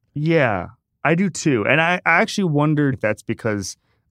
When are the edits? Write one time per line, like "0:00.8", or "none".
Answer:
0:02.9